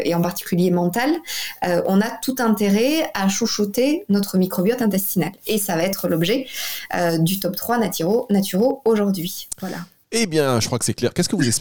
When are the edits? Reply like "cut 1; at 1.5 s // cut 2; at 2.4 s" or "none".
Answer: none